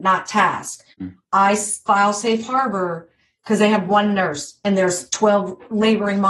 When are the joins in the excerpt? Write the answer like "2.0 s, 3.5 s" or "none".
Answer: 0.9 s